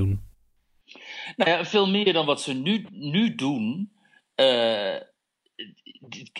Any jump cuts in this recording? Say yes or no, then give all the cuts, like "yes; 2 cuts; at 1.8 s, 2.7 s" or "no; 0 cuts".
no; 0 cuts